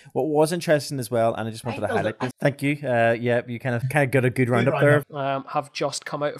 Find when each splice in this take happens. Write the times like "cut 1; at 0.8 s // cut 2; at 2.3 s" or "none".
cut 1; at 2.3 s // cut 2; at 3.8 s // cut 3; at 5.0 s